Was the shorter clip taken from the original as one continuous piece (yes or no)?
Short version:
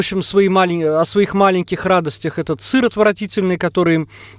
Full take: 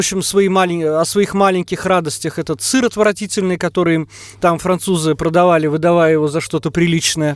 yes